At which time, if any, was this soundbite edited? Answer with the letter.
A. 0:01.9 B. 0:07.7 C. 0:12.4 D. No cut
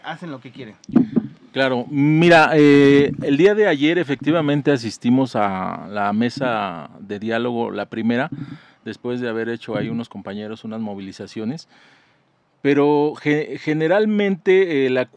D